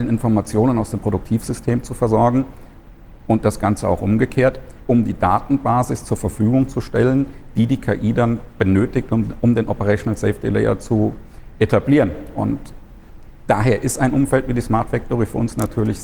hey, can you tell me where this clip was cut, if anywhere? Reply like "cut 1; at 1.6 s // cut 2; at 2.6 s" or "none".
cut 1; at 4.8 s